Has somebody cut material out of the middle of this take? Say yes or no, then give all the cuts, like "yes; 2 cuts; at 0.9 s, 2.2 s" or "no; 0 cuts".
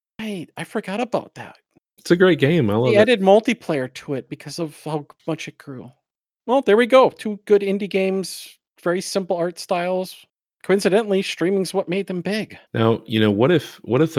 yes; 2 cuts; at 10.5 s, 12.6 s